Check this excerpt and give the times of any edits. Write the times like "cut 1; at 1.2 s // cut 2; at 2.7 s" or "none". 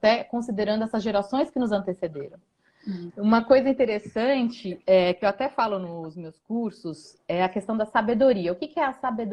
cut 1; at 3.1 s